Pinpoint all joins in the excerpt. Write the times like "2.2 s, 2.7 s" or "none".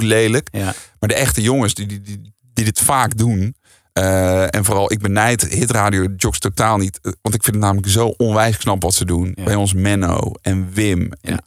none